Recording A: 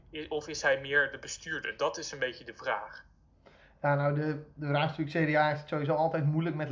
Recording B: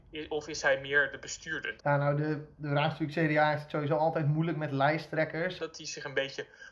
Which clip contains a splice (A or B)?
B